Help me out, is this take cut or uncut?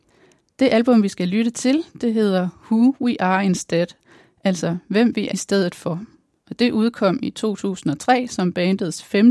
cut